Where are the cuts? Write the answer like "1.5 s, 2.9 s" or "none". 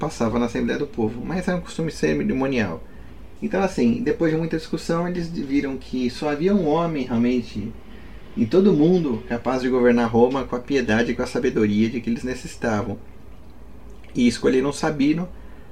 3.4 s